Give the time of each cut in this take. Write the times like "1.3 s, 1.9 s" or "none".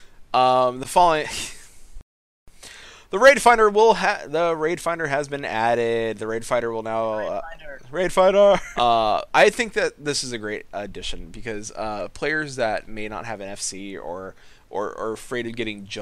8.8 s